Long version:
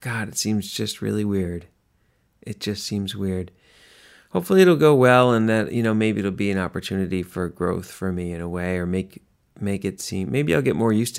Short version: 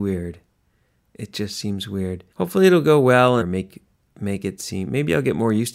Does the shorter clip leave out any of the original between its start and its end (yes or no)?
yes